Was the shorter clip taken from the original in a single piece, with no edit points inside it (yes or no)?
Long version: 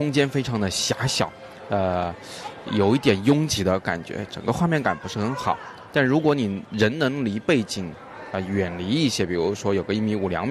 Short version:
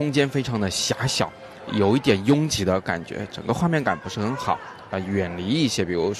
no